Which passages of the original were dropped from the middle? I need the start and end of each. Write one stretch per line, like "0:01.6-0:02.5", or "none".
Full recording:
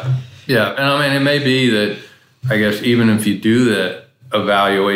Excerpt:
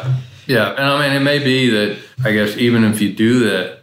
0:02.1-0:02.4